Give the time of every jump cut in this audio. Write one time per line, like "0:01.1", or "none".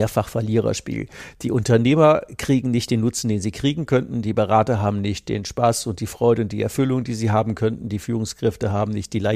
none